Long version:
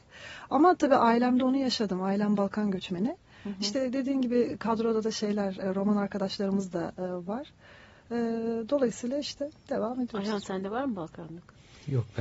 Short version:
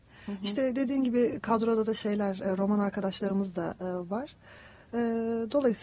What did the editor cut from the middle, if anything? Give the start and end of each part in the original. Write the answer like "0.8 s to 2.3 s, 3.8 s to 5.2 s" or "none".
none